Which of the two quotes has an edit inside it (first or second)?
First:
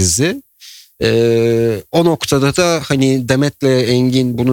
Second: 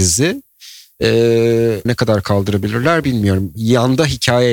second